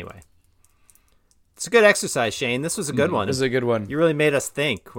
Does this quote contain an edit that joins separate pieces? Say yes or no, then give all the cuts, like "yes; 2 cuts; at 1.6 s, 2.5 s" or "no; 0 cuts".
yes; 1 cut; at 3.3 s